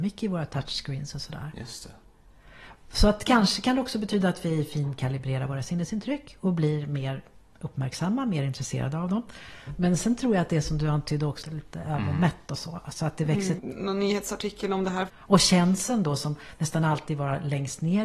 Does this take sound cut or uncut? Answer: cut